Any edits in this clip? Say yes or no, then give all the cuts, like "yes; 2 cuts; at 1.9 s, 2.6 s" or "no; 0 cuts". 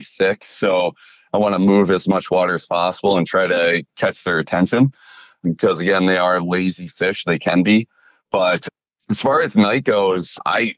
no; 0 cuts